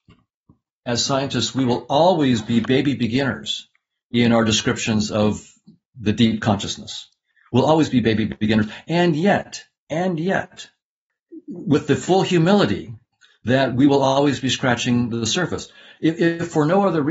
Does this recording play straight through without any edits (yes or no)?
yes